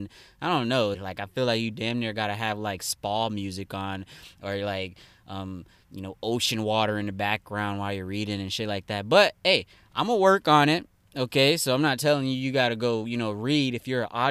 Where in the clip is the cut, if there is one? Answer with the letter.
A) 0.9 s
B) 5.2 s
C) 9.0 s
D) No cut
A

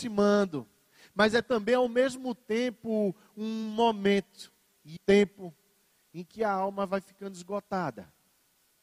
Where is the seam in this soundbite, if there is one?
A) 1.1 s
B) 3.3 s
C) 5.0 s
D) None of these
C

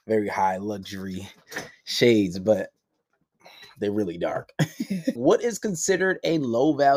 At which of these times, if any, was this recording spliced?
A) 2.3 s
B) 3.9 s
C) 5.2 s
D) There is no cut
C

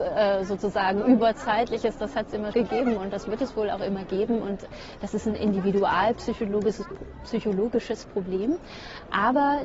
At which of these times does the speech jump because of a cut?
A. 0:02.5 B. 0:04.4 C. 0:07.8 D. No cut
A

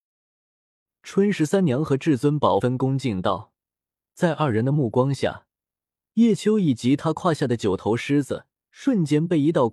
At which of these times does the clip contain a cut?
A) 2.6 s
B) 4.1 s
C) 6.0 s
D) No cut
A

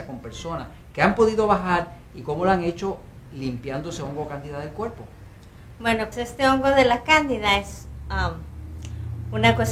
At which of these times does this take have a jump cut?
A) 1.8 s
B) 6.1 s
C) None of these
B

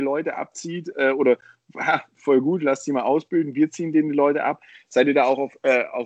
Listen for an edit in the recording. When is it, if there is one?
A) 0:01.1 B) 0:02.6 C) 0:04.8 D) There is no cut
D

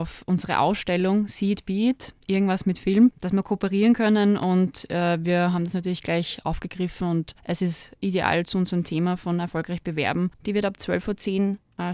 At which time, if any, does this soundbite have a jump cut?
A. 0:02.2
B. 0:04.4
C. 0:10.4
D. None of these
C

